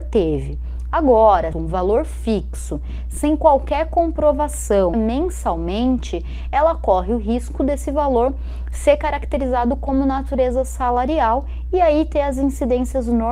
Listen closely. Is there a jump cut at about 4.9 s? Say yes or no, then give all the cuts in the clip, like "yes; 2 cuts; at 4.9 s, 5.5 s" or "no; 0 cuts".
yes; 2 cuts; at 1.5 s, 4.9 s